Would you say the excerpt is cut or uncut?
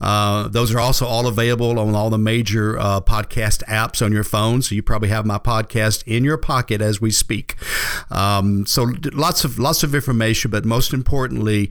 uncut